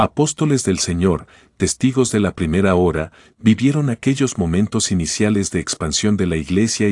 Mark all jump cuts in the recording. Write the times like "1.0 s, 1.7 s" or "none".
none